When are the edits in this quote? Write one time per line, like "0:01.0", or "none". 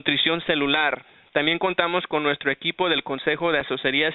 none